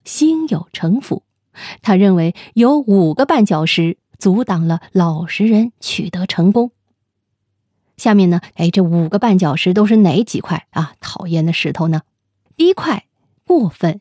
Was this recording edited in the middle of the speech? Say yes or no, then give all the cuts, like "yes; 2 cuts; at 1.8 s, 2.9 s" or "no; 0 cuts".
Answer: yes; 1 cut; at 8.5 s